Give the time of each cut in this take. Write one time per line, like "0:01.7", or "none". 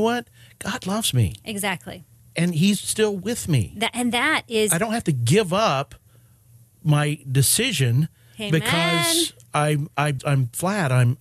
0:10.2